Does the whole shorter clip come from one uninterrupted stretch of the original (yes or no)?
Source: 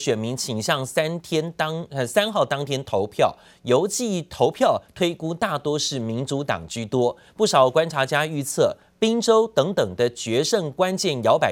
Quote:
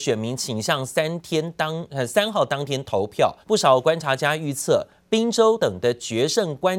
no